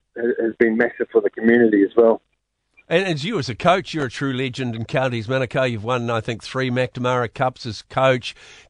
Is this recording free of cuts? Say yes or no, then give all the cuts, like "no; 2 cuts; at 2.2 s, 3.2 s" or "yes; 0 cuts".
yes; 0 cuts